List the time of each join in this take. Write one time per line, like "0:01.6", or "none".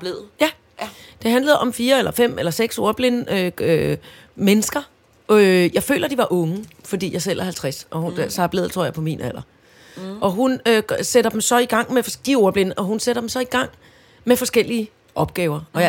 none